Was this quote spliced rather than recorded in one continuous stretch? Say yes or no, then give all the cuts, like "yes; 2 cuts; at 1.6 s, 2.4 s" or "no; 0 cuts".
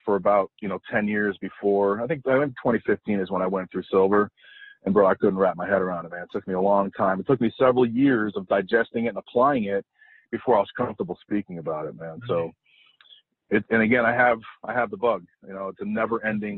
no; 0 cuts